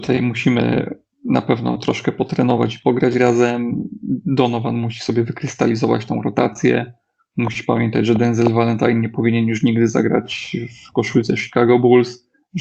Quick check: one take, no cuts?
yes; 0 cuts

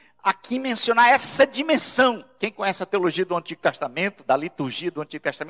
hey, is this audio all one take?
yes; 0 cuts

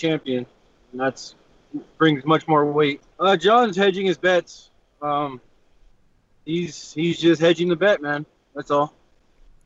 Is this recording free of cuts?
no; 1 cut; at 3.1 s

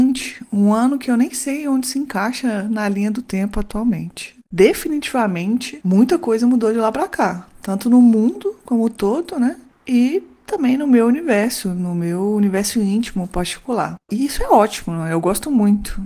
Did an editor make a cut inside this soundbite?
no; 0 cuts

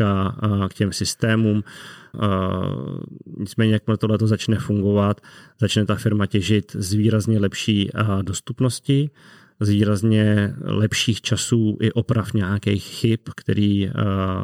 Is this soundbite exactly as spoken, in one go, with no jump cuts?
no; 1 cut; at 2.1 s

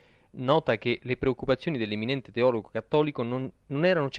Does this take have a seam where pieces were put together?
no; 0 cuts

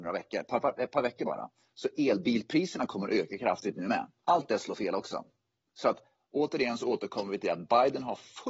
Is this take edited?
yes; 1 cut; at 4.2 s

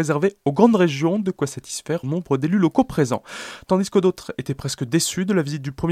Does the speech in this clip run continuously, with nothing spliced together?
no; 1 cut; at 2.0 s

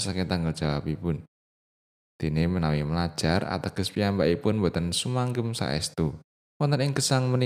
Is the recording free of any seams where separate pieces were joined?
no; 1 cut; at 6.4 s

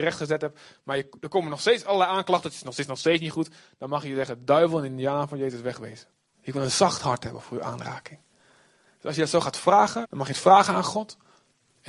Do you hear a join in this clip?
yes; 2 cuts; at 6.3 s, 10.0 s

